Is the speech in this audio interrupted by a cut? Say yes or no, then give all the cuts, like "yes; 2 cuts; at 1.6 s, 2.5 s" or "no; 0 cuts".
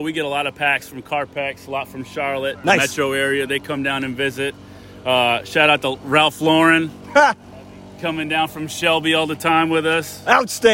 no; 0 cuts